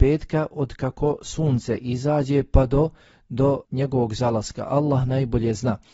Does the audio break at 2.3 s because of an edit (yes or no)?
no